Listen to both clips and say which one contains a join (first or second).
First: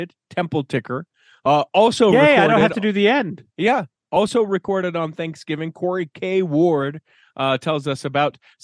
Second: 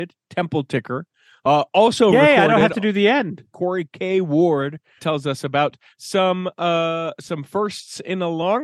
second